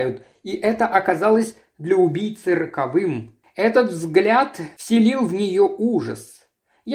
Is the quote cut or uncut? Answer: cut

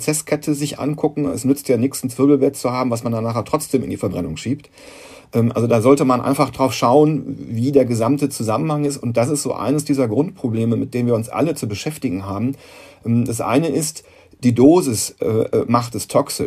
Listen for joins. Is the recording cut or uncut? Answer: uncut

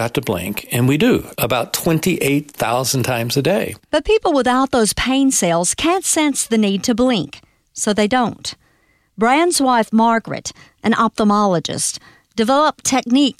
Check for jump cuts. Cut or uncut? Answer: uncut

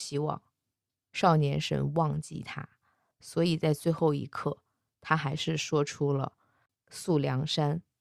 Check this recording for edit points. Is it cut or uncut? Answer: uncut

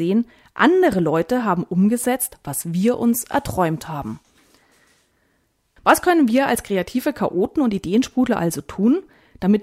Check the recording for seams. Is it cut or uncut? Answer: uncut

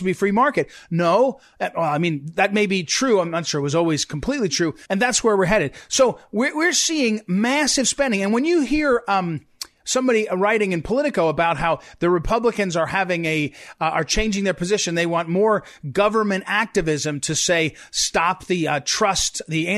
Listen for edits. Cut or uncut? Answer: cut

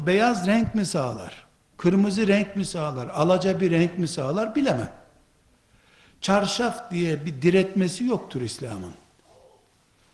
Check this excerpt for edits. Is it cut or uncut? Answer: uncut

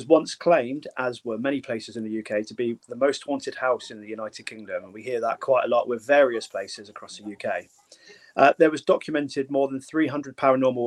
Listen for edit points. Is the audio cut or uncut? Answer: uncut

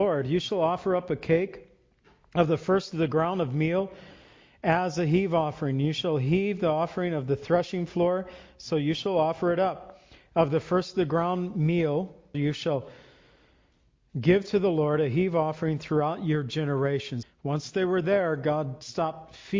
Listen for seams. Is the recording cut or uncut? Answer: cut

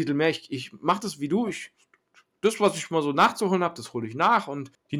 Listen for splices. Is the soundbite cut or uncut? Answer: uncut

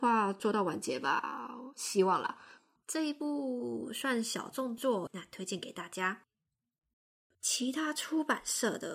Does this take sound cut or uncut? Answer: cut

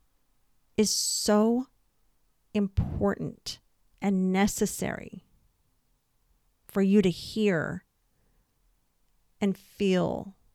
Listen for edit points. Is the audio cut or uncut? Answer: uncut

